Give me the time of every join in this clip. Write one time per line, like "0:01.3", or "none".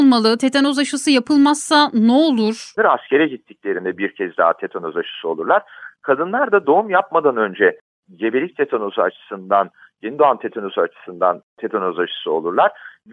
0:02.8